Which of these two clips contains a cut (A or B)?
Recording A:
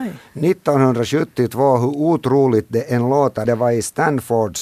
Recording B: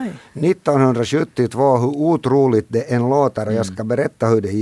A